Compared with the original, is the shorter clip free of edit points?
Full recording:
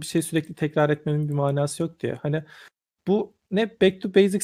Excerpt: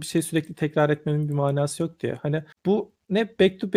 no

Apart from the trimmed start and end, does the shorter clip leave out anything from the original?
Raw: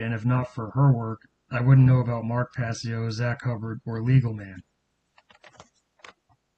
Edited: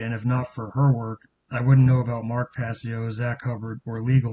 no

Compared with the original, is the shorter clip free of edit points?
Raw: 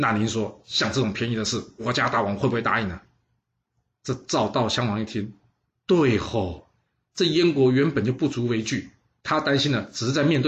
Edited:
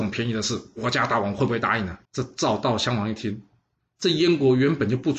no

